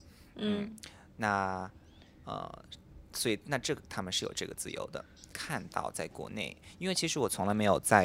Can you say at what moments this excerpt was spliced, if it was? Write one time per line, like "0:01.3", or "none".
0:05.3